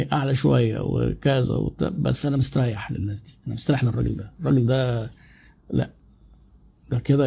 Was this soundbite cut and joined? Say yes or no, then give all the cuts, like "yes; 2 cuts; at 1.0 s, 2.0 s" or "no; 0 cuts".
no; 0 cuts